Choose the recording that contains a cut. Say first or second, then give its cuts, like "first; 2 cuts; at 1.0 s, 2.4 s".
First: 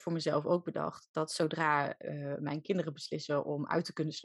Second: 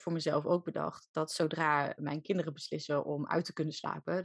second; 1 cut; at 2.0 s